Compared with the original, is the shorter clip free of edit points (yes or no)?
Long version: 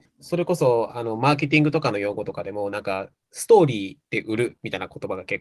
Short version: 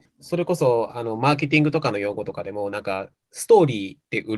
yes